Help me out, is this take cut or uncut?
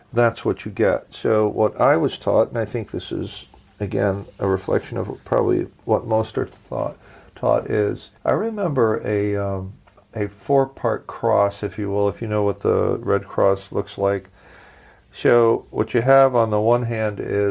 cut